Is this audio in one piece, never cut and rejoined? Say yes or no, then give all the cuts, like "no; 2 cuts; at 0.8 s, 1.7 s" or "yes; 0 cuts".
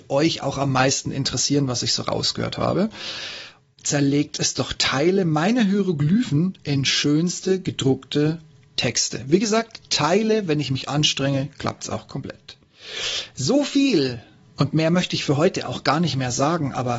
no; 1 cut; at 3.7 s